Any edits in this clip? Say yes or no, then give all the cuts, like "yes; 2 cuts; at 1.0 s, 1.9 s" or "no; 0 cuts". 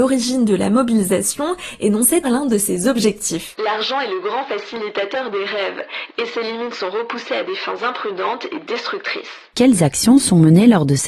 yes; 2 cuts; at 2.2 s, 6.1 s